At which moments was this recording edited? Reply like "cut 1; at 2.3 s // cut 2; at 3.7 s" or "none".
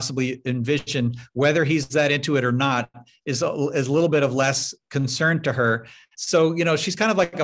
cut 1; at 6.1 s